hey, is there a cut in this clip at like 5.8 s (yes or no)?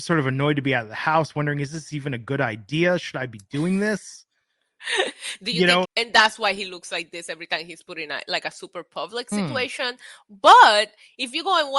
yes